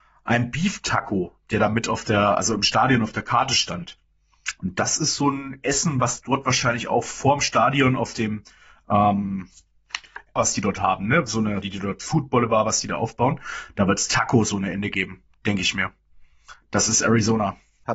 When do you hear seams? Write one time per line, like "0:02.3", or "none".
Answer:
0:10.4
0:11.6